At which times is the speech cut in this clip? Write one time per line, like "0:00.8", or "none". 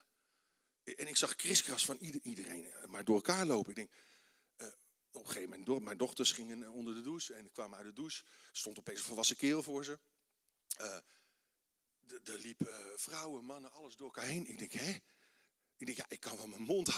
none